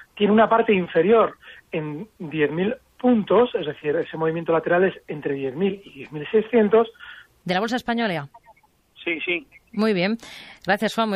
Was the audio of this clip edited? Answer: yes; 1 cut; at 7.4 s

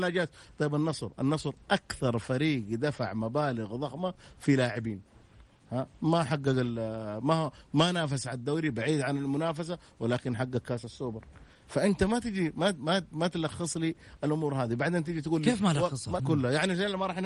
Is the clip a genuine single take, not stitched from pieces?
no; 1 cut; at 16.2 s

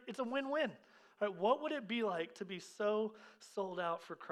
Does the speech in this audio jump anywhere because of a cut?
no; 0 cuts

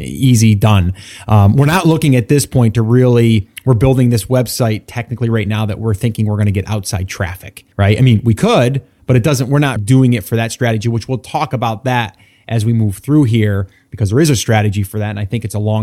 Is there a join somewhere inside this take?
yes; 2 cuts; at 7.7 s, 9.8 s

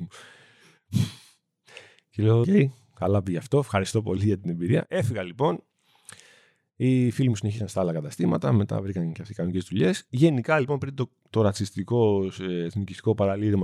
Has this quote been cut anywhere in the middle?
yes; 1 cut; at 2.4 s

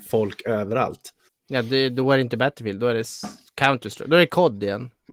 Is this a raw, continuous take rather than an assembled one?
no; 1 cut; at 1.3 s

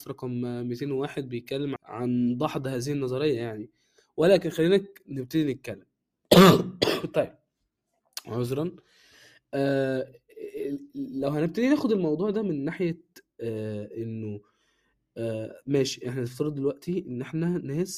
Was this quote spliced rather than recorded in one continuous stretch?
yes; 1 cut; at 1.8 s

